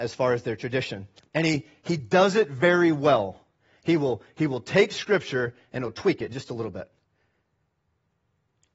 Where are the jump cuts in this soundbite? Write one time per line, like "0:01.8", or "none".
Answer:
0:01.3